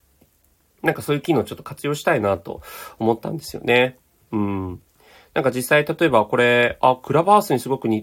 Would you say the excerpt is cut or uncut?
uncut